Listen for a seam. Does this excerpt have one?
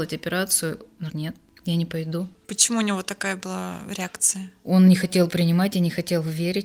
yes; 1 cut; at 1.1 s

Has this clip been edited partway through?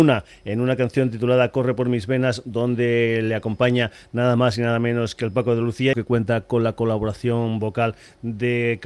yes; 1 cut; at 5.9 s

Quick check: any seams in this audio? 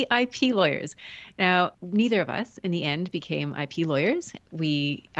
yes; 1 cut; at 1.7 s

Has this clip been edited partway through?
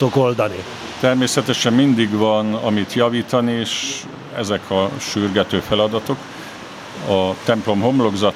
no; 0 cuts

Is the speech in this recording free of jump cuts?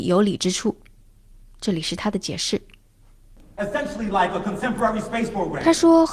yes; 0 cuts

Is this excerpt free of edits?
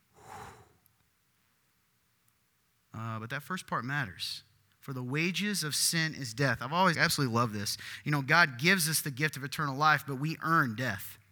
no; 1 cut; at 6.9 s

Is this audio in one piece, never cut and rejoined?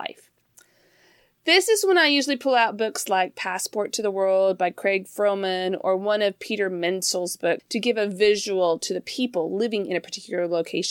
no; 1 cut; at 7.6 s

